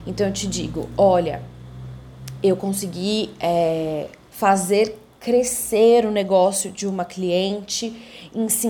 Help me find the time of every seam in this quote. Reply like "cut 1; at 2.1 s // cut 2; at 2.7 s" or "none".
cut 1; at 4.3 s